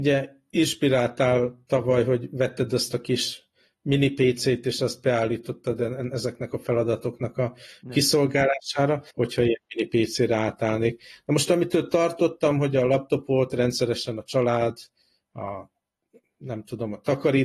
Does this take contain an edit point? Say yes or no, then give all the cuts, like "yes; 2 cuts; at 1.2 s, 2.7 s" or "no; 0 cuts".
yes; 1 cut; at 9.1 s